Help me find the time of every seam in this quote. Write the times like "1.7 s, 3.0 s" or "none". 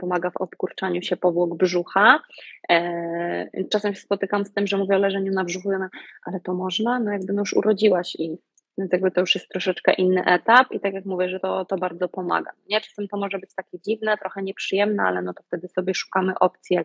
none